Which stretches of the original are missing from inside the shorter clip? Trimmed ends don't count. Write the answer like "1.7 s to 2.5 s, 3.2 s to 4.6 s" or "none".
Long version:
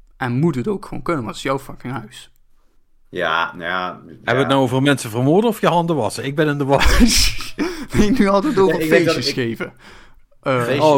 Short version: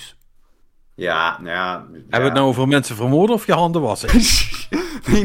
6.2 s to 6.9 s